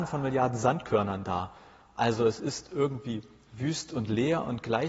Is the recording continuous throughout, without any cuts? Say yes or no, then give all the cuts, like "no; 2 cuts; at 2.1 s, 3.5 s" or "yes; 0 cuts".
yes; 0 cuts